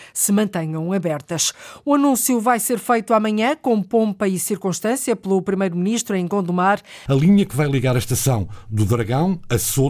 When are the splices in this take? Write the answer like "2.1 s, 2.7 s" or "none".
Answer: 7.1 s